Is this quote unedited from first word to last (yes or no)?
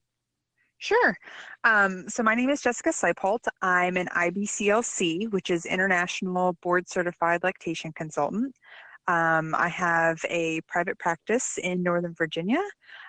yes